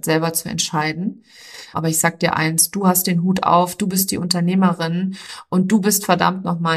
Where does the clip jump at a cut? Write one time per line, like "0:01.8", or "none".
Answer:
0:01.7